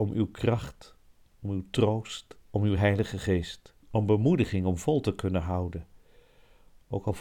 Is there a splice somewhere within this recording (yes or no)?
yes